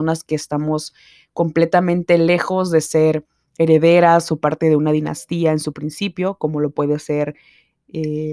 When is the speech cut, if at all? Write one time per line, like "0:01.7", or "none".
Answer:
none